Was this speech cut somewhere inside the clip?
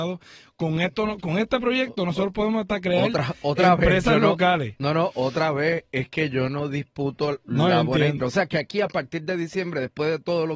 yes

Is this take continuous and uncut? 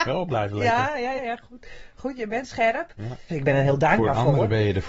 no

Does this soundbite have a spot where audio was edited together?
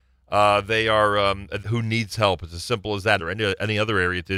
yes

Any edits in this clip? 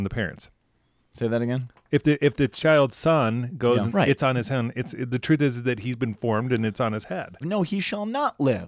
yes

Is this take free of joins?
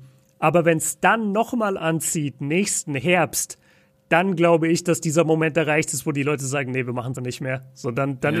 no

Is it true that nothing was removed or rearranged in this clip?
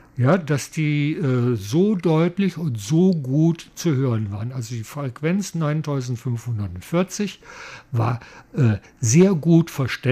yes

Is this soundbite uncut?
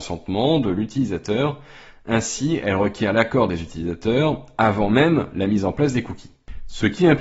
yes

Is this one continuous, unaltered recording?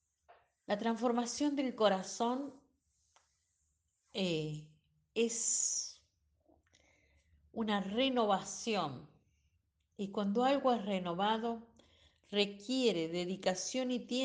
yes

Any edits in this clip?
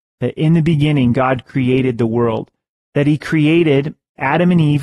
no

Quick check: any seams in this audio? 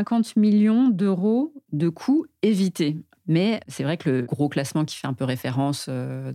yes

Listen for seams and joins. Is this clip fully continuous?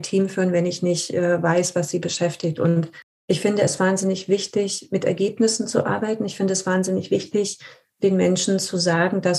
yes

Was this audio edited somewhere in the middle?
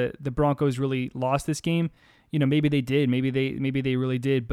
no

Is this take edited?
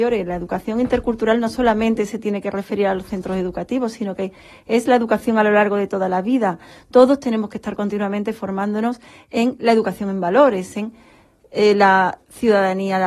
no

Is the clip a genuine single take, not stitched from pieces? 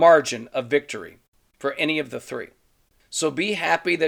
no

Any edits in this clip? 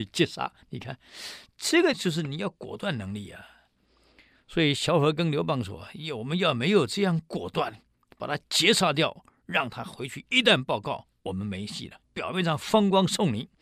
yes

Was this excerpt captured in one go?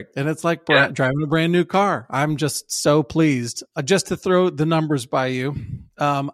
yes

